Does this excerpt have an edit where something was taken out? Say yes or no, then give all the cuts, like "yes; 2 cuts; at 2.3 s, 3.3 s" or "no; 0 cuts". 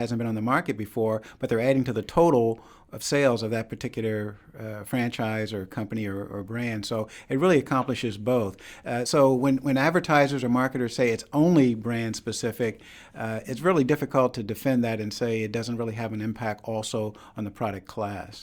no; 0 cuts